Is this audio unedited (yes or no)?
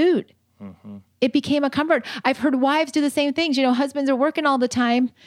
yes